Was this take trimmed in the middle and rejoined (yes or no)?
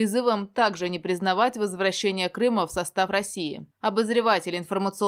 no